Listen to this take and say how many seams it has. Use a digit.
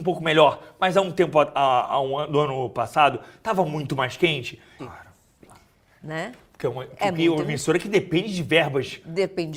1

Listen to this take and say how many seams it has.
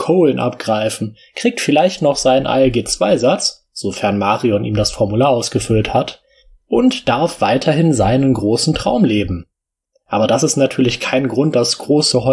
0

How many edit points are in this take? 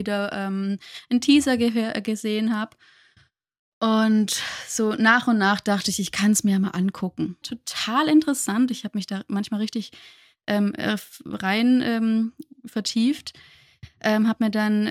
1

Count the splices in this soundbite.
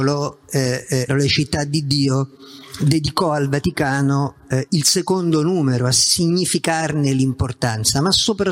1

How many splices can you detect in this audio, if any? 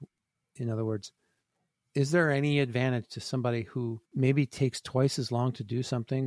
1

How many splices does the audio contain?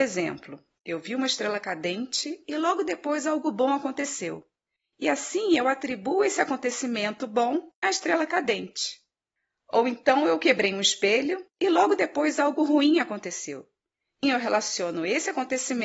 1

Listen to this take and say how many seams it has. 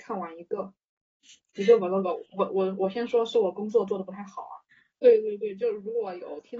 1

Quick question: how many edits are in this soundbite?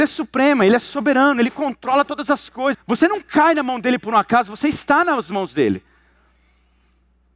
1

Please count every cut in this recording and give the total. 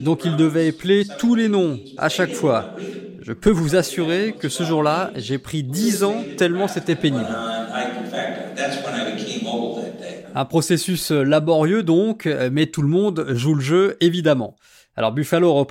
1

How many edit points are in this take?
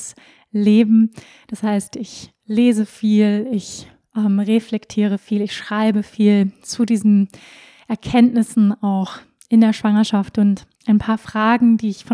1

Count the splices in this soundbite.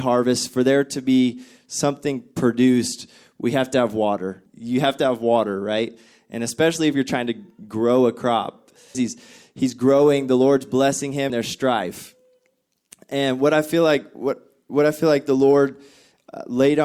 3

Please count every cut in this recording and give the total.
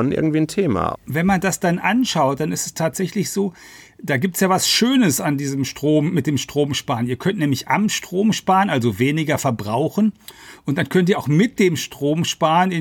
1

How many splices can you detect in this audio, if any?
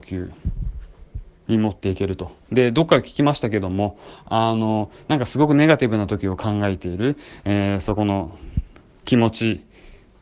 1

